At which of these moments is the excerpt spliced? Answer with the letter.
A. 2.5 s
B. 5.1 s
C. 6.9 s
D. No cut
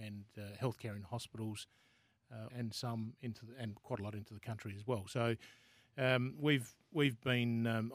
A